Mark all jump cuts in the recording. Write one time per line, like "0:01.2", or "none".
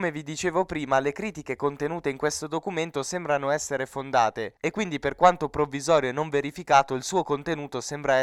none